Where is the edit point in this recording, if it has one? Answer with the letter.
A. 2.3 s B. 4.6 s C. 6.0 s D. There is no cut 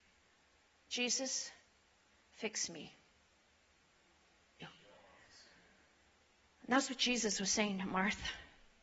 B